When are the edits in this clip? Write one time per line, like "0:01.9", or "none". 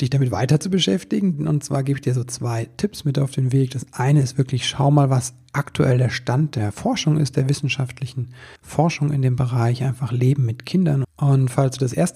0:08.6
0:11.0